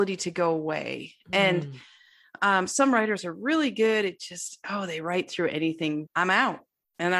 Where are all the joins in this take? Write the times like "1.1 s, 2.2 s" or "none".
6.1 s